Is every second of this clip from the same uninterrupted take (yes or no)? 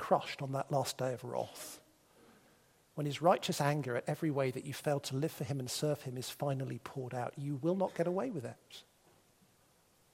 yes